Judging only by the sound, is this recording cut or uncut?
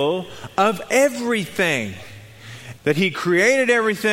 cut